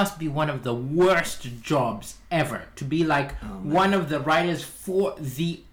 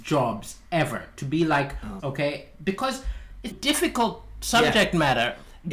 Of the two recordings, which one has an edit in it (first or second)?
second